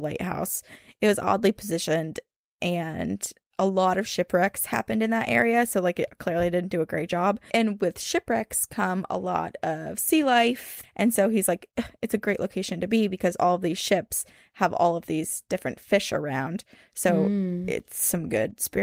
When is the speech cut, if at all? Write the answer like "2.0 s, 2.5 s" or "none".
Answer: 10.8 s